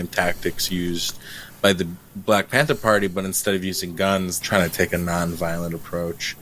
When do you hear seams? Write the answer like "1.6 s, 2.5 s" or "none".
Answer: 4.4 s